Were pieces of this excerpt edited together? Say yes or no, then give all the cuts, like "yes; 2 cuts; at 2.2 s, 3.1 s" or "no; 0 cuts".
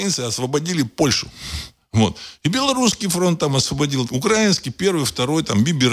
yes; 1 cut; at 4.1 s